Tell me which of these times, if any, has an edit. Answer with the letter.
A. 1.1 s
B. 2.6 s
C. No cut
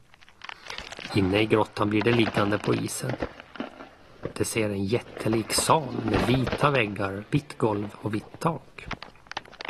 A